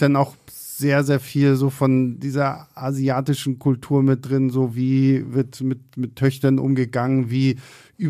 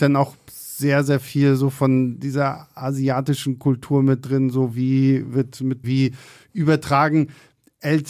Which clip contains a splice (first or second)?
second